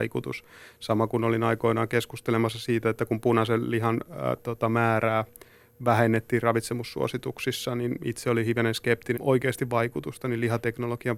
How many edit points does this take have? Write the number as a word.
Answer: one